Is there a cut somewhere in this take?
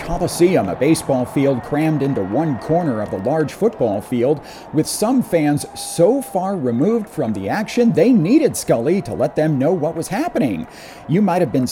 no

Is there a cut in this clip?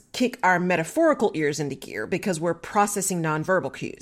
no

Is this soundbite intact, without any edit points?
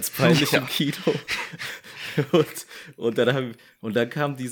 yes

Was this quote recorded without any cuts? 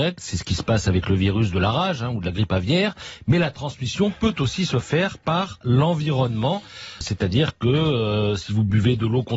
no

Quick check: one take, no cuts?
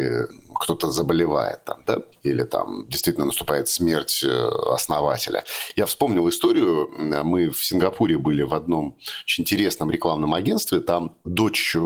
yes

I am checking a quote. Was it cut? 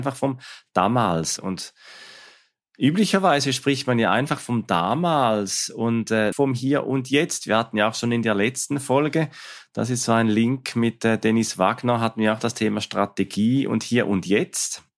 yes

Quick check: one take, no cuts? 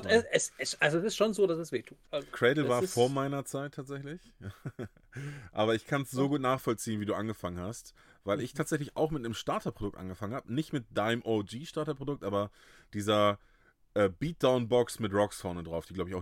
no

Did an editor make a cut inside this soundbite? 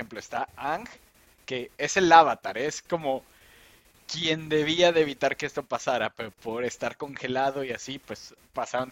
yes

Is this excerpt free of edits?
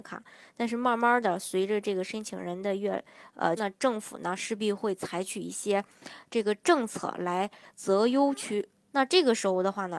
no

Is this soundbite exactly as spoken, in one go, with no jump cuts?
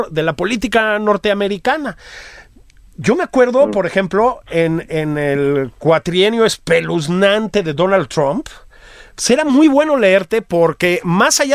yes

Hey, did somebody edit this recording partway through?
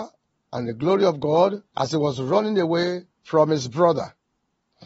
yes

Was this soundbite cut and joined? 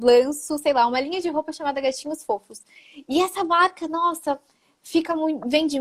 no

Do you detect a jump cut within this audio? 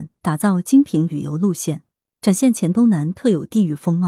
no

